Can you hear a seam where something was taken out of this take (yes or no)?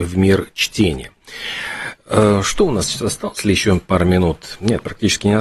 yes